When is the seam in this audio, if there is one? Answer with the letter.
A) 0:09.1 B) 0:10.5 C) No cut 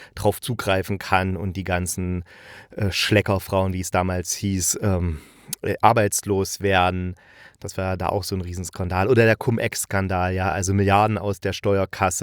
C